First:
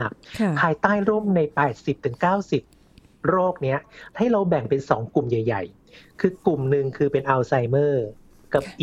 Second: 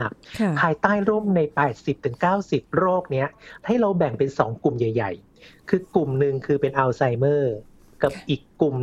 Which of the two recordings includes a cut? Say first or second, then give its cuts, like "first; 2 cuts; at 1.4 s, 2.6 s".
second; 1 cut; at 2.7 s